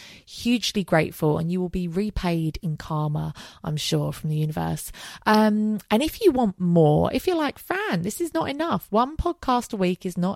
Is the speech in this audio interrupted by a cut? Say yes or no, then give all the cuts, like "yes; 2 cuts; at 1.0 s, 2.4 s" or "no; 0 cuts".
no; 0 cuts